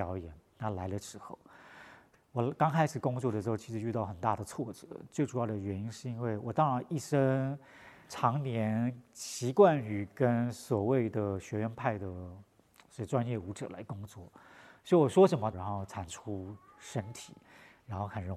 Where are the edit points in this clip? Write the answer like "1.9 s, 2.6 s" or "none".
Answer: 15.5 s